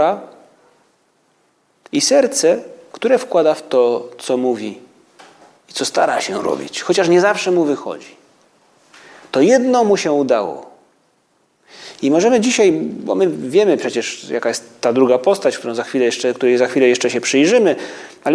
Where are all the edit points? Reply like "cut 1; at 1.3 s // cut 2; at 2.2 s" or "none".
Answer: none

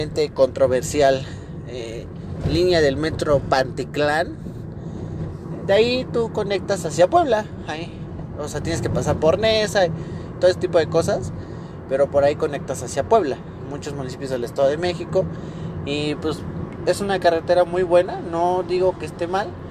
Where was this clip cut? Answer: none

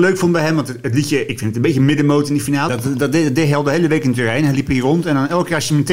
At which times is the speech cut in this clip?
cut 1; at 2.7 s

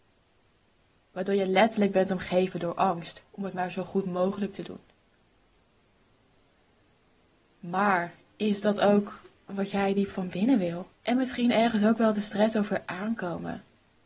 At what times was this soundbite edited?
cut 1; at 3.2 s // cut 2; at 11.0 s

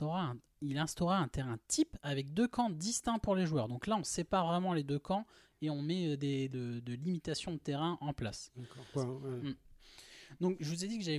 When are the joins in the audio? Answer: cut 1; at 6.5 s // cut 2; at 8.9 s

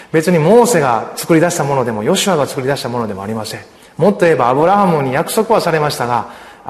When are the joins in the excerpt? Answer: none

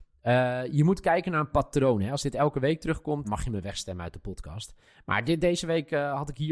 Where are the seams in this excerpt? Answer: cut 1; at 3.2 s

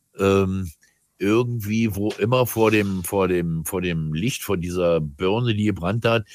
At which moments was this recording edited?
none

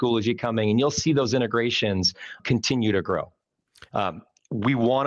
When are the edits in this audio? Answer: cut 1; at 2.4 s // cut 2; at 3.9 s

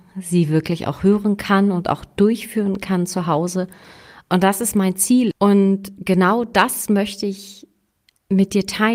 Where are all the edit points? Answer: cut 1; at 5.3 s

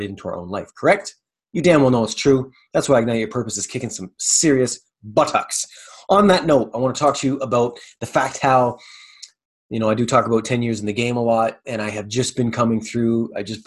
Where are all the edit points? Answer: cut 1; at 11.6 s

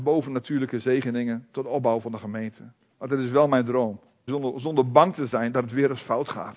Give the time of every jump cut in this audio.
cut 1; at 2.9 s // cut 2; at 4.3 s

